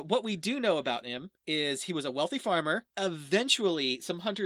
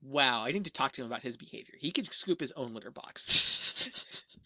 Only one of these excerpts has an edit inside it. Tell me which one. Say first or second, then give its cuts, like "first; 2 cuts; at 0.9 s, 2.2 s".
first; 1 cut; at 2.9 s